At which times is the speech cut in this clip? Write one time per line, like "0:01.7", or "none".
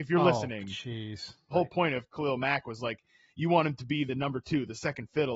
0:01.5